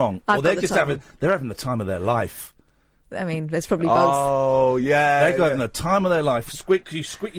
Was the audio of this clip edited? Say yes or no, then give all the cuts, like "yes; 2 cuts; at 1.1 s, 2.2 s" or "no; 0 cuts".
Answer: no; 0 cuts